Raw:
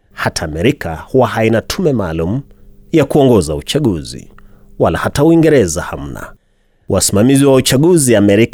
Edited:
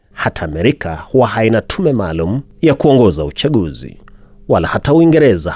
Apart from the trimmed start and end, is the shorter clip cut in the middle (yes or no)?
yes